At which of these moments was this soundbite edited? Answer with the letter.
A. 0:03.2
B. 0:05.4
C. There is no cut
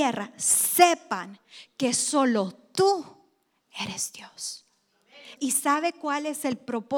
B